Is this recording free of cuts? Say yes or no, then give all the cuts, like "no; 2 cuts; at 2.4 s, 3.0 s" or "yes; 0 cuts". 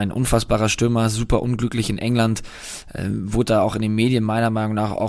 yes; 0 cuts